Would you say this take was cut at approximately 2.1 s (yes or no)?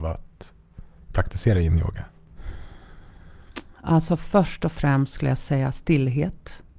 no